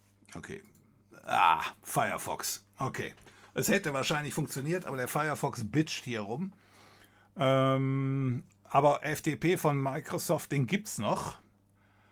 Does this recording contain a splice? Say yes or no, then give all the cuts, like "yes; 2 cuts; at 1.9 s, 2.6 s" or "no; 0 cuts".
no; 0 cuts